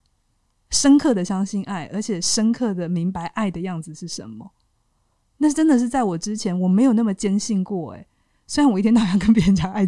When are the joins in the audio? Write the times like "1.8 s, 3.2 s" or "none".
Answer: none